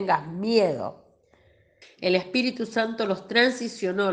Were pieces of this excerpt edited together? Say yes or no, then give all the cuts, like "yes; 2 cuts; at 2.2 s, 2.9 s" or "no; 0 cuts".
yes; 1 cut; at 1.8 s